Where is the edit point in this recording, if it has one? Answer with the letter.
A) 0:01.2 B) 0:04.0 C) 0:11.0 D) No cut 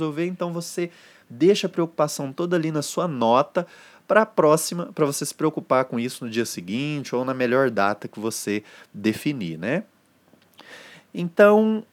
D